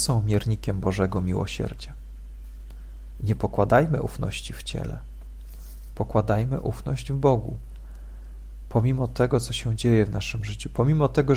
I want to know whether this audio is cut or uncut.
uncut